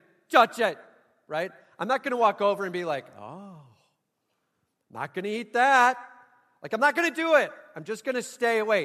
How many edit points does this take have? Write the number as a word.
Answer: zero